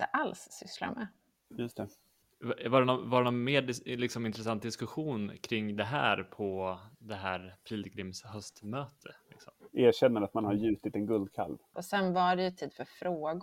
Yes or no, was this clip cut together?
yes